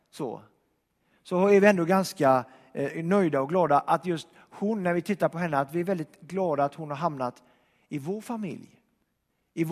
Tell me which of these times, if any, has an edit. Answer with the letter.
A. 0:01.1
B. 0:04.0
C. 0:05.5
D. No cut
D